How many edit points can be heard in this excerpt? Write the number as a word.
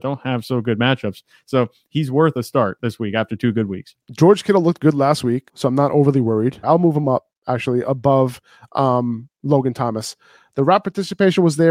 three